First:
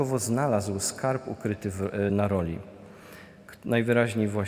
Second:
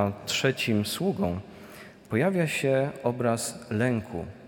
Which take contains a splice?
first; 1 cut; at 2.1 s

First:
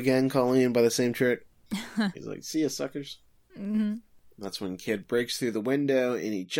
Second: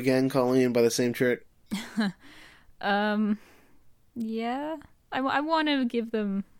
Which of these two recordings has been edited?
first; 1 cut; at 2.1 s

